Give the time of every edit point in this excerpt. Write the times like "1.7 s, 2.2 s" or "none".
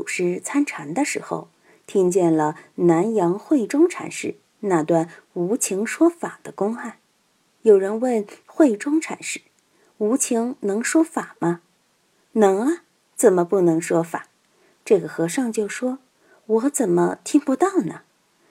none